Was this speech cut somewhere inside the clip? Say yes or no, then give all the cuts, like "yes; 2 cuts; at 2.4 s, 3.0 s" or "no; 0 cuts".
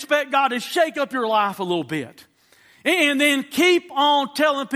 no; 0 cuts